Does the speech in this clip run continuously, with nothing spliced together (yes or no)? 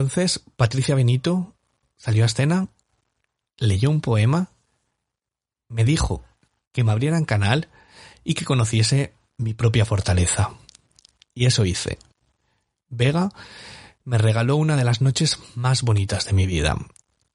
yes